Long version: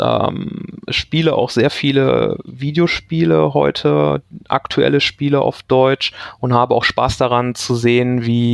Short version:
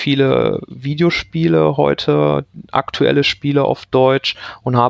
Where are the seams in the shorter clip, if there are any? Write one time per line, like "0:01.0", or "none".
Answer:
none